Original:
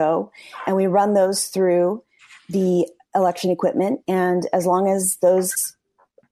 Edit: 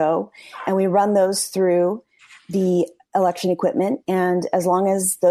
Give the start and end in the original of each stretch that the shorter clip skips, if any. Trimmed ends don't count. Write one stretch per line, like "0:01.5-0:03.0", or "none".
none